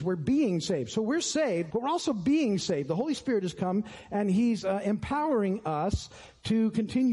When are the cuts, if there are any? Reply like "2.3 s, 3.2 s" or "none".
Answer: 1.7 s